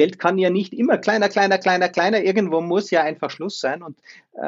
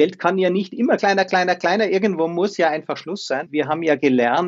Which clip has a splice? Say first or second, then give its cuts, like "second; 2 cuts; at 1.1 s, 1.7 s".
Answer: second; 2 cuts; at 1.0 s, 3.5 s